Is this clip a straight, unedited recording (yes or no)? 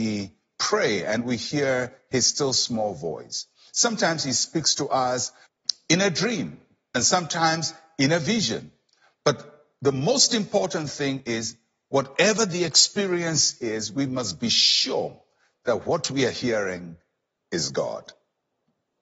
yes